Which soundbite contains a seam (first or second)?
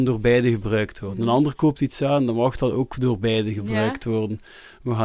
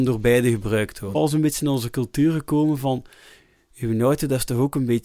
second